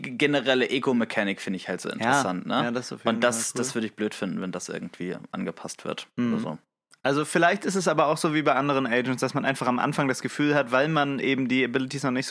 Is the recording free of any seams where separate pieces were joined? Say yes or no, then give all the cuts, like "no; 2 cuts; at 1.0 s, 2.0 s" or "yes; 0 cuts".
yes; 0 cuts